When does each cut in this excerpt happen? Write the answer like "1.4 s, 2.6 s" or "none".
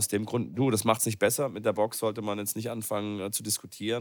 none